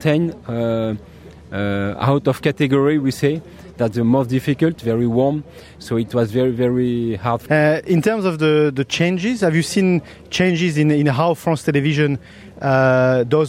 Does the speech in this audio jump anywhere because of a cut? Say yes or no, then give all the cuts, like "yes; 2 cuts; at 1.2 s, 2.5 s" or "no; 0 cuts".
yes; 1 cut; at 4.8 s